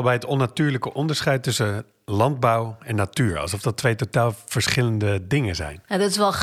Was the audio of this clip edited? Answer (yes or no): no